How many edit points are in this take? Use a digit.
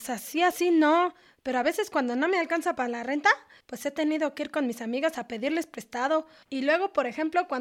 2